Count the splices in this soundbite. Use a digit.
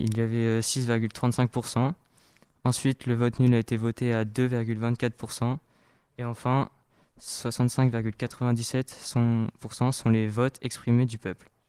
0